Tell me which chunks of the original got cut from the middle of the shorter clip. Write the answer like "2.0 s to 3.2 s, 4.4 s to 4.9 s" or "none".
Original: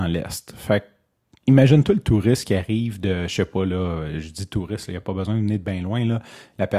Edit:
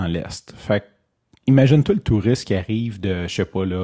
none